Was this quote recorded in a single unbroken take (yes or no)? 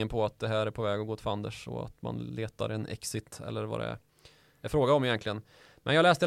yes